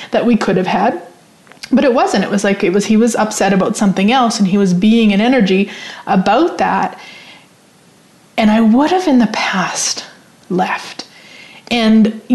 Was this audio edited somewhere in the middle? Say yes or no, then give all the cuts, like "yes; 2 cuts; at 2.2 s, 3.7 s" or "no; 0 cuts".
no; 0 cuts